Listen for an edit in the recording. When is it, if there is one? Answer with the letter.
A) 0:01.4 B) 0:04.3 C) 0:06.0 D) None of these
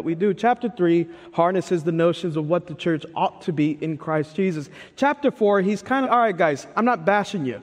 C